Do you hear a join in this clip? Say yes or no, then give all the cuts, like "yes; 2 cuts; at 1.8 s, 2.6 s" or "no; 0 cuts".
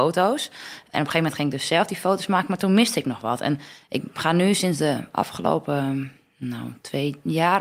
no; 0 cuts